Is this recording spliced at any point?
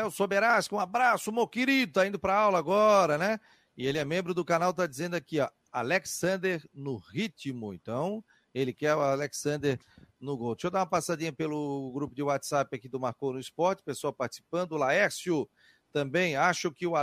no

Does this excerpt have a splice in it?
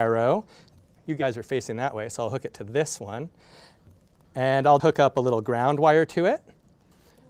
yes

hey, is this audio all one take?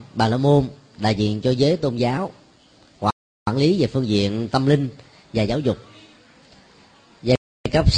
yes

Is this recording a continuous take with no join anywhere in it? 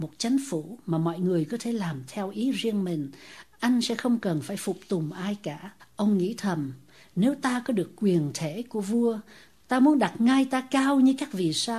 no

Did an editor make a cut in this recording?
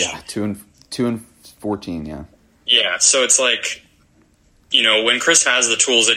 no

